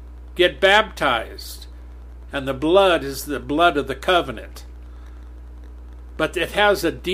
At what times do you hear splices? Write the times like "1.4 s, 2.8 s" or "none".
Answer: 2.3 s, 6.2 s